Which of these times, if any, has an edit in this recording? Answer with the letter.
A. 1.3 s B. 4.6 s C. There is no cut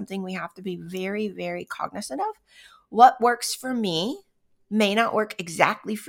C